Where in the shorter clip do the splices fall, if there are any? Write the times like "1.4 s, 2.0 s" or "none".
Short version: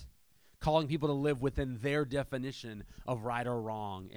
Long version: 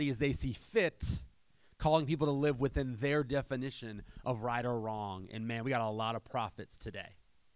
none